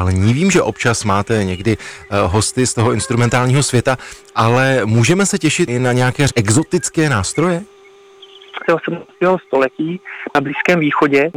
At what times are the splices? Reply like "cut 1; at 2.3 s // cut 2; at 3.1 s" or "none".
cut 1; at 6.3 s // cut 2; at 8.6 s

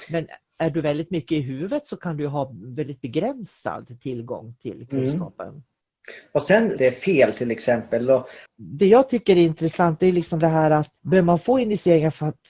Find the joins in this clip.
cut 1; at 6.8 s // cut 2; at 8.5 s // cut 3; at 11.0 s

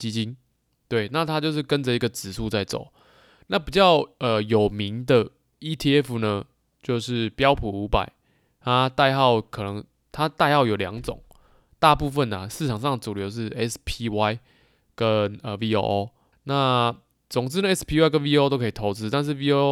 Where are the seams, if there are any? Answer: cut 1; at 16.3 s

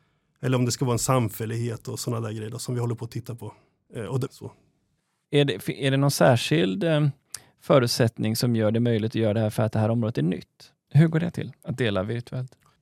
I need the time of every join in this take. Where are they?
cut 1; at 4.3 s // cut 2; at 10.9 s

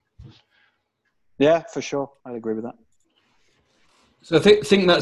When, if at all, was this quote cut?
cut 1; at 2.2 s

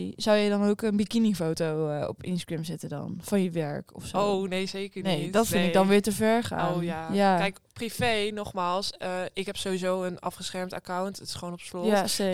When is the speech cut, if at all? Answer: none

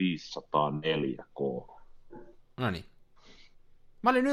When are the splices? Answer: none

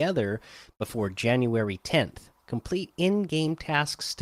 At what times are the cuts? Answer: cut 1; at 2.4 s

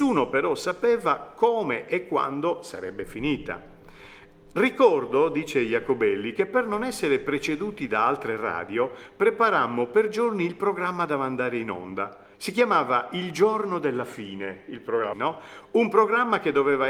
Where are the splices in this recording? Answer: cut 1; at 12.3 s // cut 2; at 15.1 s

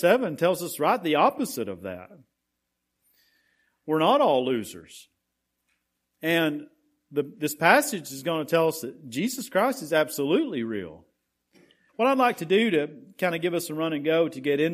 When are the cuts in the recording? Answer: cut 1; at 11.9 s

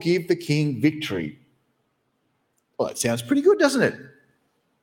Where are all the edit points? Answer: none

